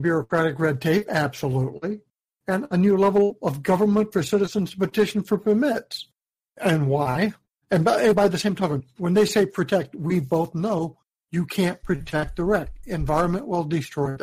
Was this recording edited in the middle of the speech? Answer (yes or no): no